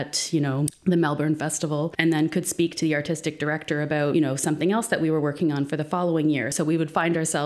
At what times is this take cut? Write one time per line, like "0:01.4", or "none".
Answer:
none